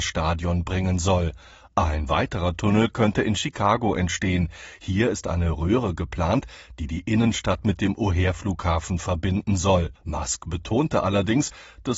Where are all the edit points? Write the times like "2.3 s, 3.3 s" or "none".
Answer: 10.0 s